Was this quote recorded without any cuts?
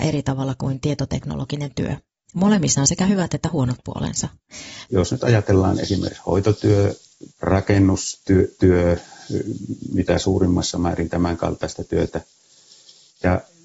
no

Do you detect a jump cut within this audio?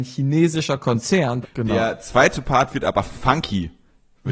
yes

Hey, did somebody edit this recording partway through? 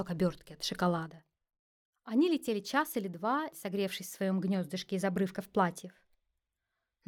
yes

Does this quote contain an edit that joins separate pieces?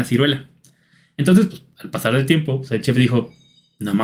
no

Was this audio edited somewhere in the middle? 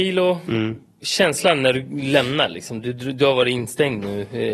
no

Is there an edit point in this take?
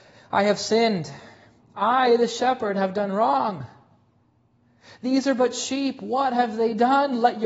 no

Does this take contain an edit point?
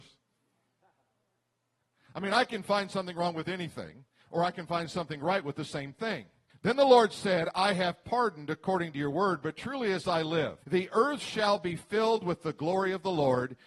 yes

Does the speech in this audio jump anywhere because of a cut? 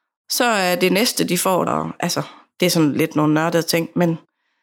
yes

